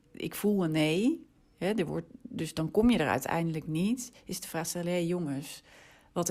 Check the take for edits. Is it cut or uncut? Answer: uncut